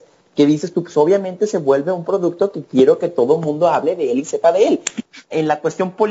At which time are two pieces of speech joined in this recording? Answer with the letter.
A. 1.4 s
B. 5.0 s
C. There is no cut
B